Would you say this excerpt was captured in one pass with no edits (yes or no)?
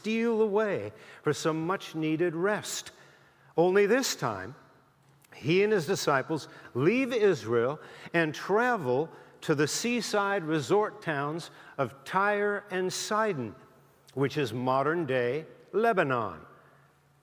yes